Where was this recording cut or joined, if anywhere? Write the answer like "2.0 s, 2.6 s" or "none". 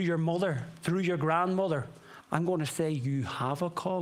2.2 s

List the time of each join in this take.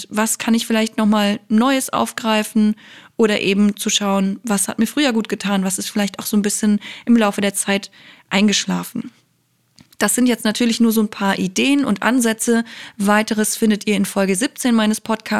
none

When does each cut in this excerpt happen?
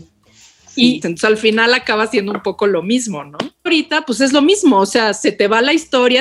1.0 s, 3.7 s

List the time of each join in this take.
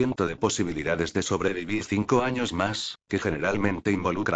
3.0 s

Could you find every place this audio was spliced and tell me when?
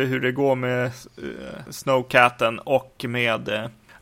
1.7 s

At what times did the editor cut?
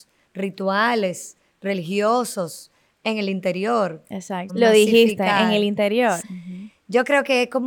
4.5 s, 6.2 s

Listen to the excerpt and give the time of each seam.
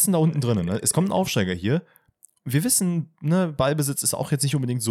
none

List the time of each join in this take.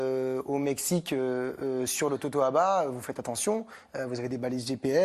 none

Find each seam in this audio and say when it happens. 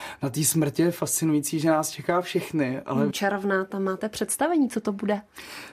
3.1 s

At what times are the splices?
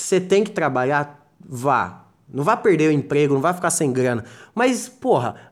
none

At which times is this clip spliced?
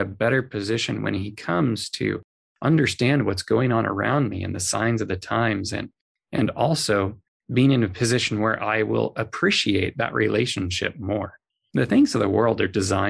none

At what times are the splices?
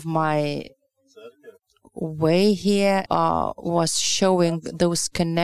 3.1 s

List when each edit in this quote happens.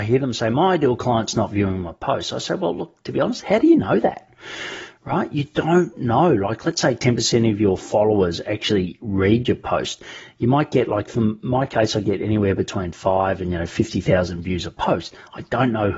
none

